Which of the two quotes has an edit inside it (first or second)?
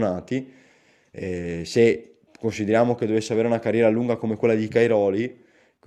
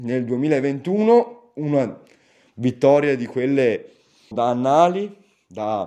second